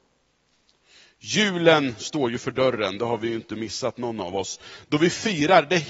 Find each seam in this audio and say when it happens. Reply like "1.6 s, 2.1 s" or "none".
none